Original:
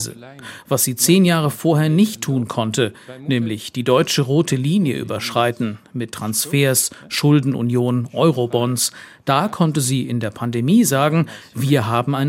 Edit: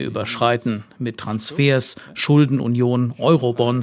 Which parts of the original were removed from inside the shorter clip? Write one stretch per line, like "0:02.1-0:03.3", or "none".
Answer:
none